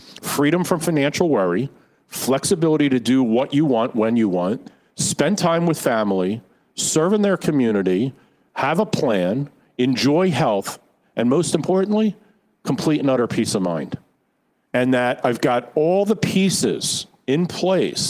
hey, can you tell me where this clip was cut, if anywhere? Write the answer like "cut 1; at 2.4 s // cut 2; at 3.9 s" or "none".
cut 1; at 14.7 s